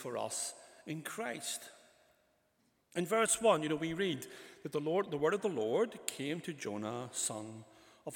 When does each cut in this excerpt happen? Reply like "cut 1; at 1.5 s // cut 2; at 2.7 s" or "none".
none

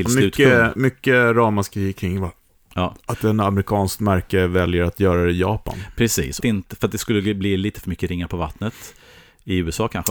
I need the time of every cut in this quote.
cut 1; at 6.4 s

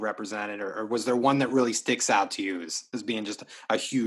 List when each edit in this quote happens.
none

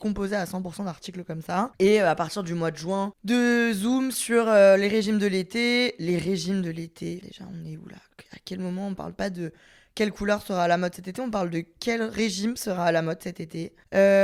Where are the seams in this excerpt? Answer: cut 1; at 7.2 s

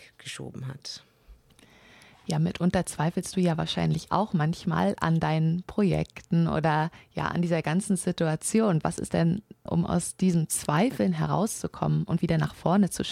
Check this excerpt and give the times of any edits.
cut 1; at 9.7 s

